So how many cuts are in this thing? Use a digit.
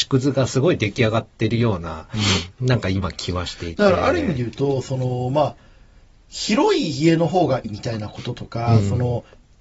1